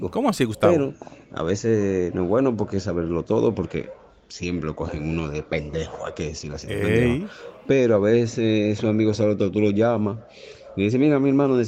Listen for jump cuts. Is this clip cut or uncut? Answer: uncut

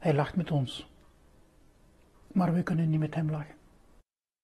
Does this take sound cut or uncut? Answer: uncut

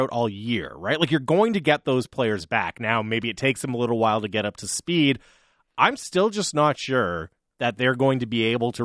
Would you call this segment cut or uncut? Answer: uncut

